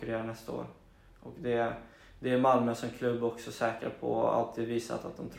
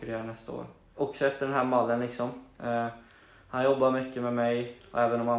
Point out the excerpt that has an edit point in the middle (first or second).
second